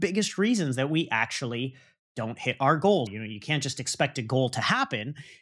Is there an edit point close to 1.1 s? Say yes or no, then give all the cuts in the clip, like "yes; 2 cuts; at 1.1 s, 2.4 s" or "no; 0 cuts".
no; 1 cut; at 3.1 s